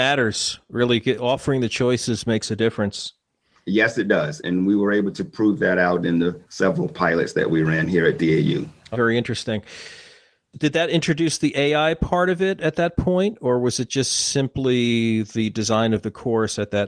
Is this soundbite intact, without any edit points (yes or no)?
no